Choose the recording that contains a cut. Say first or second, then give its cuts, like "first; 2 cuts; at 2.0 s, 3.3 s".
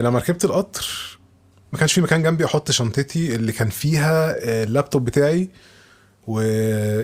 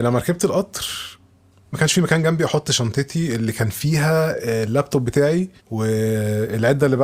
second; 1 cut; at 5.6 s